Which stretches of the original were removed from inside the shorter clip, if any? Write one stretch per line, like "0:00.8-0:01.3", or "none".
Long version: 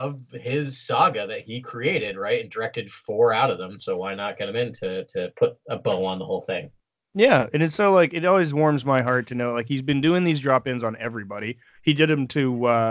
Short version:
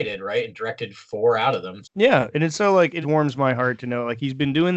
0:03.8-0:07.0
0:08.2-0:08.5